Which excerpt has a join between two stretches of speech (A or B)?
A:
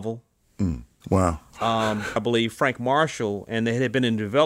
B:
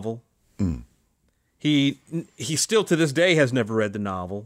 A